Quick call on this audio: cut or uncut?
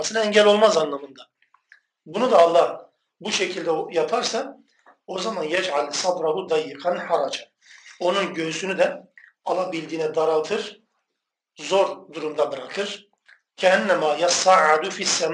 uncut